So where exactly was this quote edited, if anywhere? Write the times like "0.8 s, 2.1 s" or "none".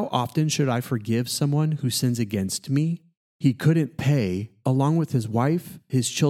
3.2 s, 4.6 s